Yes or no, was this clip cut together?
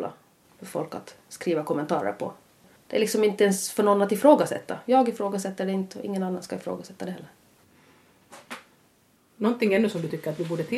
no